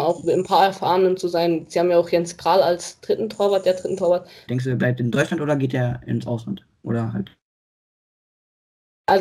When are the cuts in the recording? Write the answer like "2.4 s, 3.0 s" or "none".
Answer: 4.5 s